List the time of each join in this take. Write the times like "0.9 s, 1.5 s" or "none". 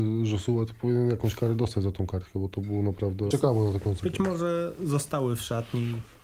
3.3 s

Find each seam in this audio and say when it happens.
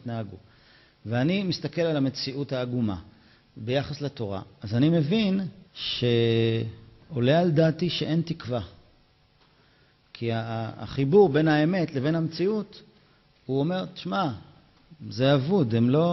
5.7 s

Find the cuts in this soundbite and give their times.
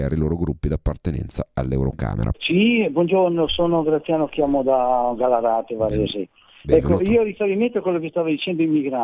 2.3 s

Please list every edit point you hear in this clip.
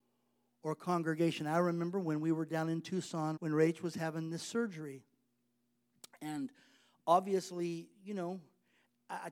3.3 s

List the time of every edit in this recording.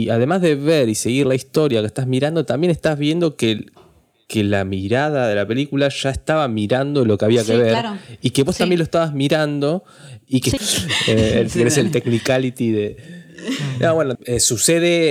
10.6 s, 14.2 s

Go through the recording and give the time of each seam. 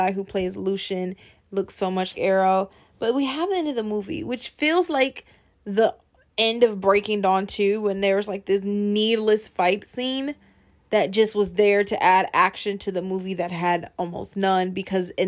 2.1 s

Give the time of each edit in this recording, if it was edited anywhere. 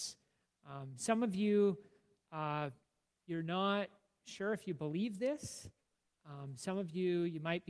none

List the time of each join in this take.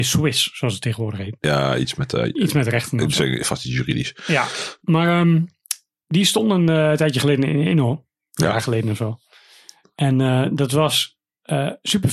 none

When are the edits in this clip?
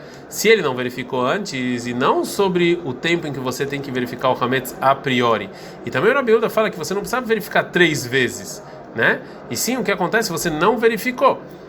none

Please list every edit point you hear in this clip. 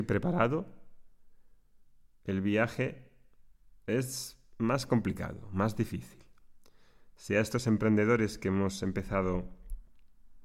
none

